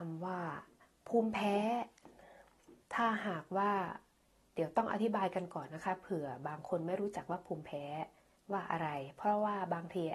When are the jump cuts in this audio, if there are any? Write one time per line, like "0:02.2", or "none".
0:02.8